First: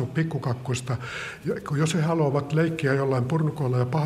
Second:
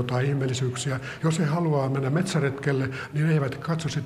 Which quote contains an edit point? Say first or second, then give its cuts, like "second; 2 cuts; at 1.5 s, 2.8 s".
second; 1 cut; at 1.2 s